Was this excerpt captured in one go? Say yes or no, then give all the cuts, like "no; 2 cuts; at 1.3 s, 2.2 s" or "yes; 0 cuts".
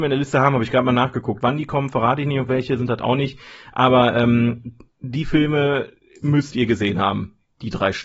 no; 2 cuts; at 1.4 s, 4.9 s